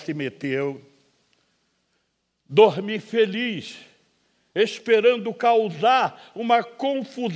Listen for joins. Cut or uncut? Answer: uncut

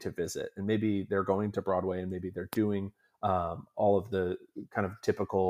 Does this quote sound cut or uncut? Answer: uncut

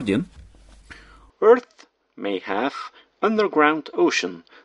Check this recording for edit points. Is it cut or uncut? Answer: uncut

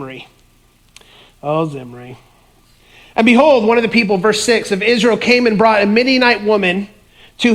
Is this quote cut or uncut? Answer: uncut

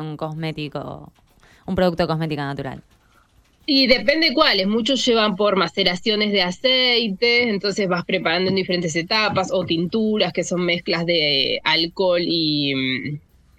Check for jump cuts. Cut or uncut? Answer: uncut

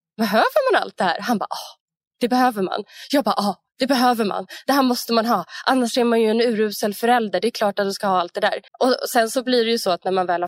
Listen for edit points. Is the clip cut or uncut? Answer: cut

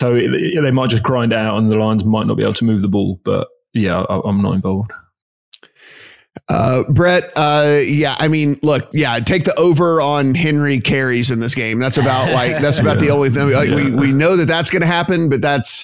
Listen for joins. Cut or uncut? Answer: cut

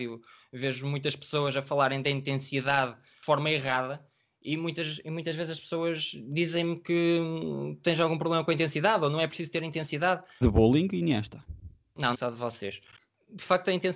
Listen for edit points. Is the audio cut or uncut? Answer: cut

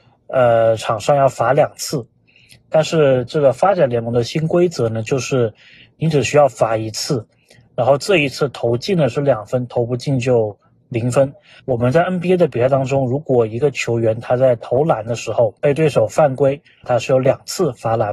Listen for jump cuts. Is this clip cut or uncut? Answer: cut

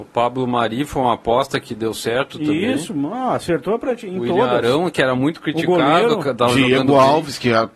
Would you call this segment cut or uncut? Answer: uncut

